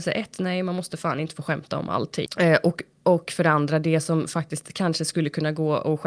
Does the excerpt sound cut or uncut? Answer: cut